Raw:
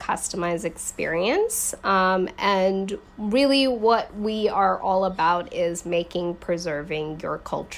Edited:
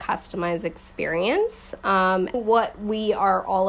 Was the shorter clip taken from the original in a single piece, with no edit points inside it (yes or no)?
no